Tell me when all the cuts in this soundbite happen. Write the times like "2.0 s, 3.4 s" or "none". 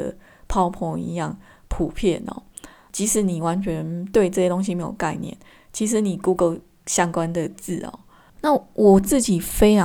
8.3 s